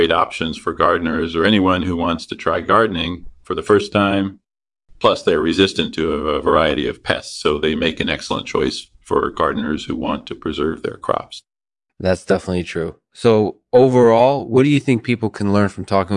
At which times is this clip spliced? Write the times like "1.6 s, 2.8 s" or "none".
none